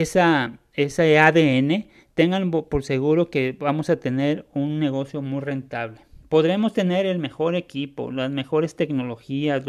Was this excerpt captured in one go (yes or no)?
yes